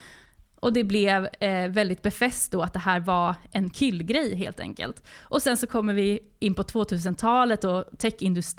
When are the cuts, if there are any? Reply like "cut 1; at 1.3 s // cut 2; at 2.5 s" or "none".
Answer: none